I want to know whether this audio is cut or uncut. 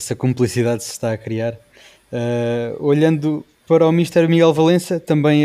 uncut